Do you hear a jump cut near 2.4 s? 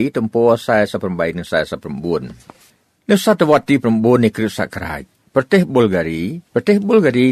no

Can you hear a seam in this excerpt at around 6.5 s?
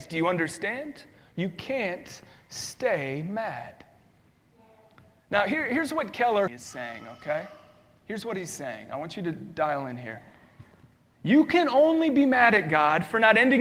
yes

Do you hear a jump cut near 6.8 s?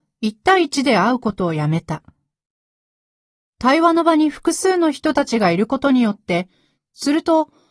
yes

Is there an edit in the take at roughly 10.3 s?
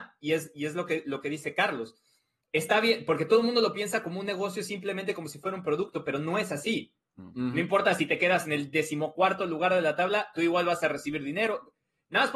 yes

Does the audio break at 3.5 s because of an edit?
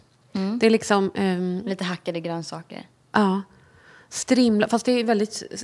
no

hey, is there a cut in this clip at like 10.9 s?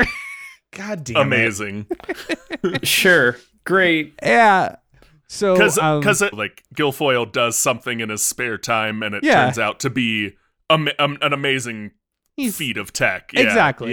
no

